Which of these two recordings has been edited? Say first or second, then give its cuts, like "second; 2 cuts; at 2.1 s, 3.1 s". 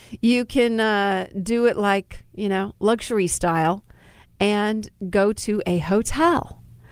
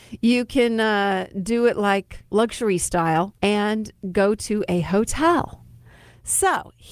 second; 2 cuts; at 2.3 s, 3.4 s